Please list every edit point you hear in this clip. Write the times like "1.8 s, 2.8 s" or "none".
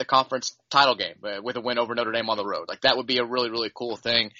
none